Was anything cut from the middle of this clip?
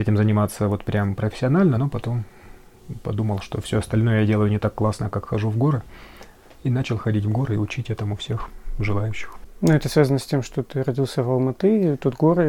no; 0 cuts

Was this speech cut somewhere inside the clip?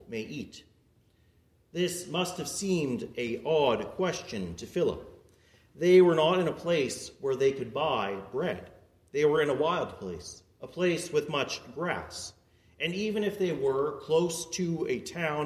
no; 0 cuts

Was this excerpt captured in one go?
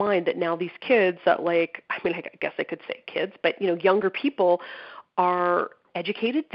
yes; 0 cuts

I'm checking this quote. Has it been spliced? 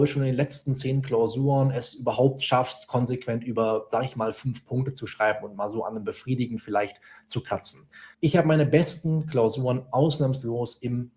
yes; 1 cut; at 8.1 s

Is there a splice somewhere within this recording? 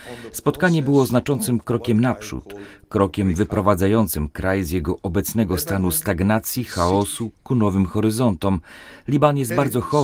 no; 0 cuts

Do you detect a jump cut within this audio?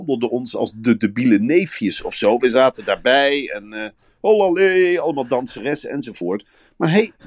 no; 0 cuts

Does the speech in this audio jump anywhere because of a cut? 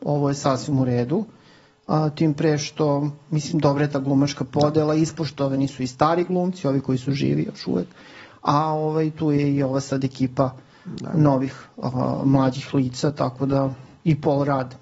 no; 0 cuts

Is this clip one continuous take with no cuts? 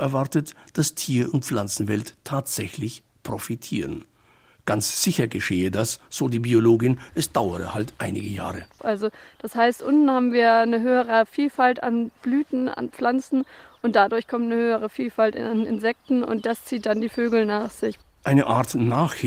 no; 1 cut; at 8.8 s

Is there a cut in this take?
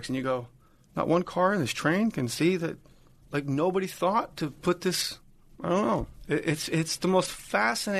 no; 0 cuts

